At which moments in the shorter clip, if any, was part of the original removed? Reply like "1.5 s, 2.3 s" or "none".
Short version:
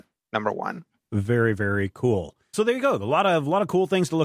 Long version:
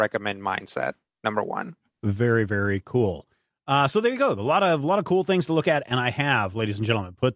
2.5 s